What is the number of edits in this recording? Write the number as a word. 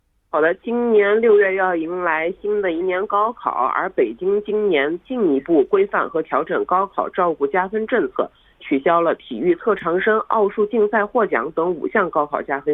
zero